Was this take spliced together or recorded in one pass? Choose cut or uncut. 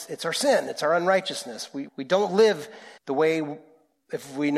cut